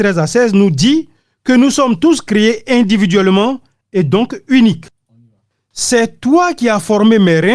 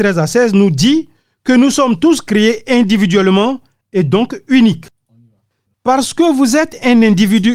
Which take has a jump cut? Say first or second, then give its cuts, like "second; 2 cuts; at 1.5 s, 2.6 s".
second; 1 cut; at 5.7 s